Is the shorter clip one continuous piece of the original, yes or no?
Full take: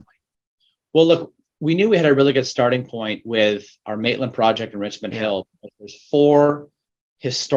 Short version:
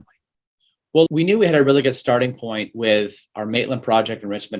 no